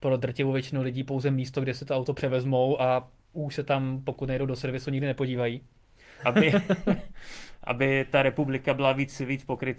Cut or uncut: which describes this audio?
cut